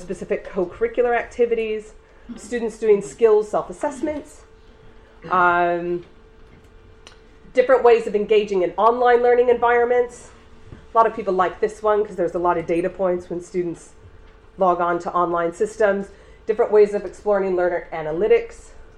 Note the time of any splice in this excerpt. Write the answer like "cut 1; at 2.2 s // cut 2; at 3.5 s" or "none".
cut 1; at 2.3 s